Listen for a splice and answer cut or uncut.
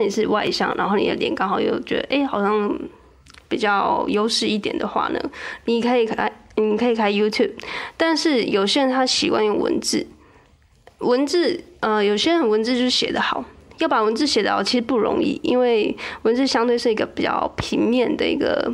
uncut